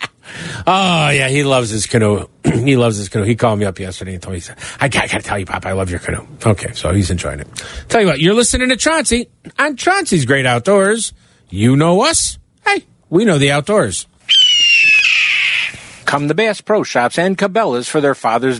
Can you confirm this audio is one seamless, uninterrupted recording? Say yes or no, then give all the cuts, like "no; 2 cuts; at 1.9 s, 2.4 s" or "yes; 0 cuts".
no; 1 cut; at 16.0 s